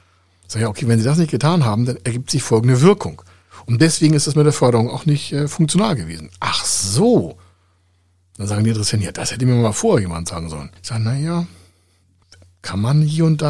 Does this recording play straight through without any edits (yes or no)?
yes